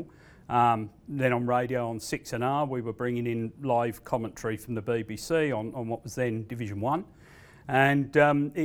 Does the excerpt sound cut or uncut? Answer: uncut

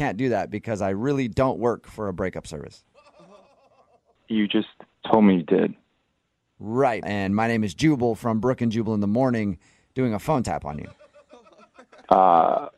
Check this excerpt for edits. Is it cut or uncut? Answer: cut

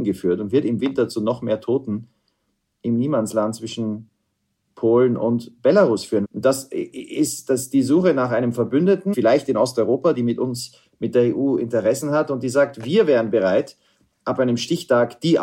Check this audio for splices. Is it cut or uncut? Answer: cut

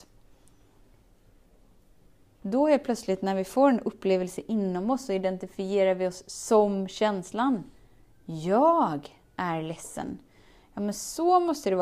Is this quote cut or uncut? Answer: uncut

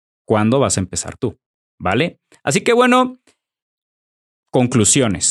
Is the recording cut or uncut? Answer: uncut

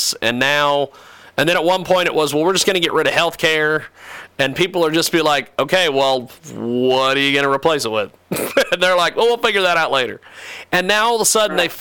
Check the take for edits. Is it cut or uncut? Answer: uncut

